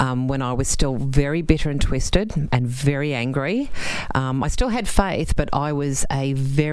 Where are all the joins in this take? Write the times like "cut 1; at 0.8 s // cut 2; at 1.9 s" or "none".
none